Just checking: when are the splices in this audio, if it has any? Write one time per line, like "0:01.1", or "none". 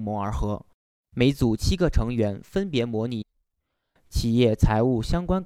0:01.0